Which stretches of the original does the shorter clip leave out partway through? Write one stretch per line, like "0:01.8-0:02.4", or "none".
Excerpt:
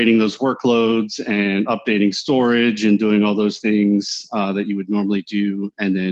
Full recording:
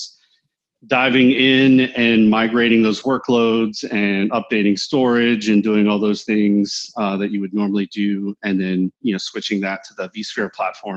none